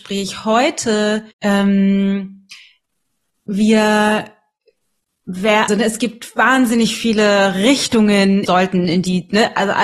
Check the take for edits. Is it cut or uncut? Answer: cut